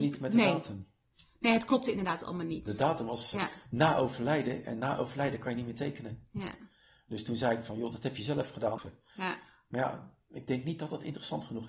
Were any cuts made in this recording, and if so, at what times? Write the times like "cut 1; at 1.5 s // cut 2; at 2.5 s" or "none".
cut 1; at 3.3 s // cut 2; at 8.8 s